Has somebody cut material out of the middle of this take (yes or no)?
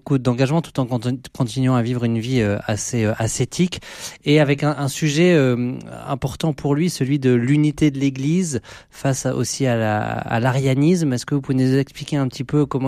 no